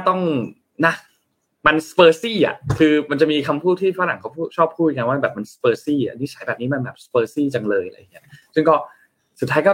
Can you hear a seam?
no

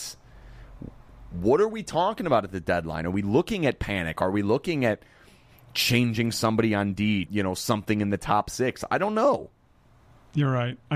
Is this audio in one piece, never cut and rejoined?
no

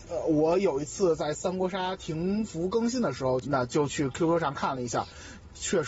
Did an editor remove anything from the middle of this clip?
yes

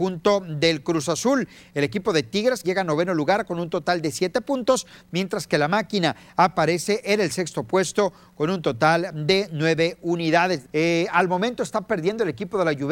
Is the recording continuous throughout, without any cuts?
no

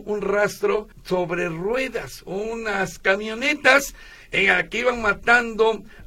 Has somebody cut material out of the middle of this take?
yes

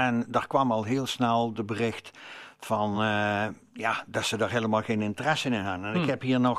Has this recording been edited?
no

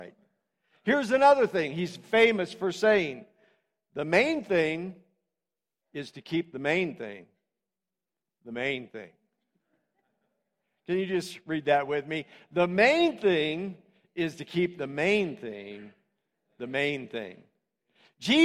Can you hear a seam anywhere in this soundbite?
no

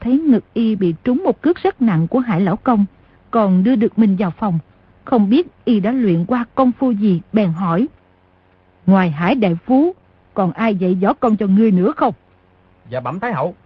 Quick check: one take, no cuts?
no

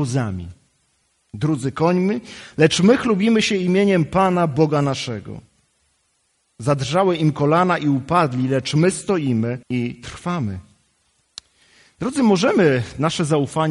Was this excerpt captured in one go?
no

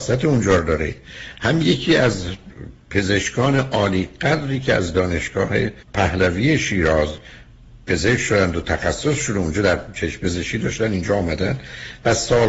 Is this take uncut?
no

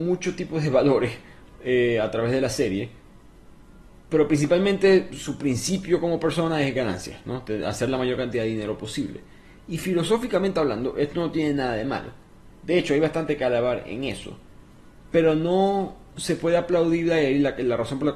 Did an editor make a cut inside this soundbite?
no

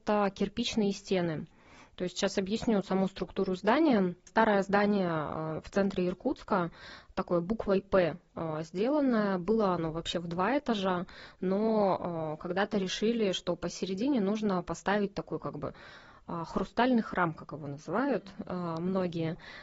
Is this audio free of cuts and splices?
yes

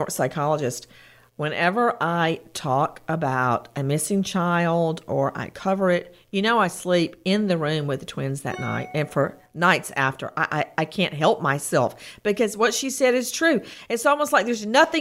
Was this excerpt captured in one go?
yes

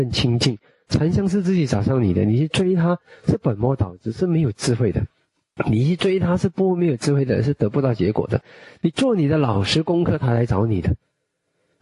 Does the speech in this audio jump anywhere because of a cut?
no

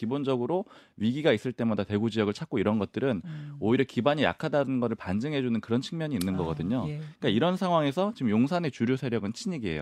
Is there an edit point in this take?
no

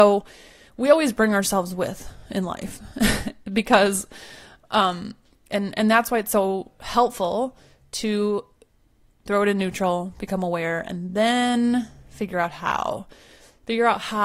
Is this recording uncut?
yes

